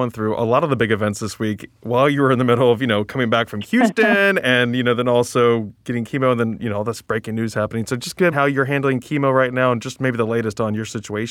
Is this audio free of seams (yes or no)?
no